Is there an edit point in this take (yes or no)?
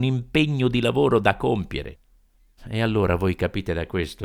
yes